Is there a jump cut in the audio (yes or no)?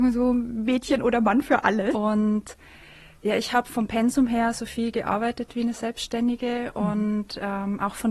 yes